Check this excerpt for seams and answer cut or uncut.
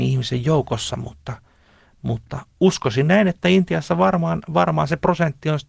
uncut